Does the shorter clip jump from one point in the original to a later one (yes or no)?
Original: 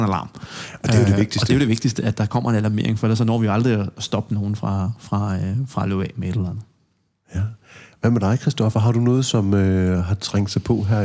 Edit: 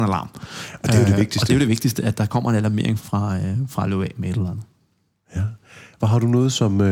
yes